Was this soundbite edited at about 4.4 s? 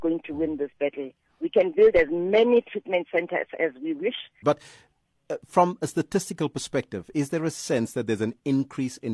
yes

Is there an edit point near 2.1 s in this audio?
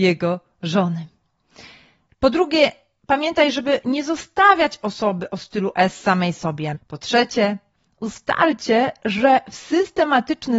yes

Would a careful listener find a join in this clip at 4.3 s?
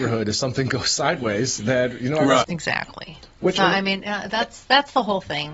no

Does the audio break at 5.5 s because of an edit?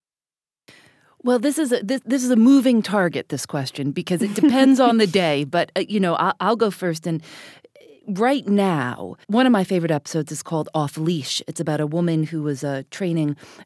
no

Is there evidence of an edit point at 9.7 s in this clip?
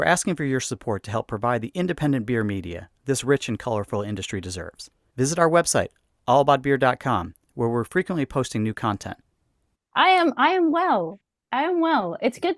yes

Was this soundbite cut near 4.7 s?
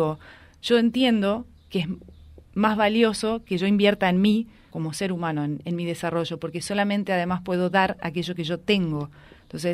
yes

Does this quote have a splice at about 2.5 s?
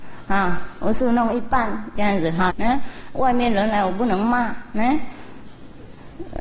yes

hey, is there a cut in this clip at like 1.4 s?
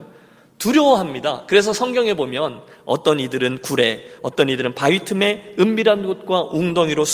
no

